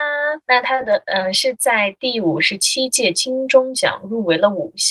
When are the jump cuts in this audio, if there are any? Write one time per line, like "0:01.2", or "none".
none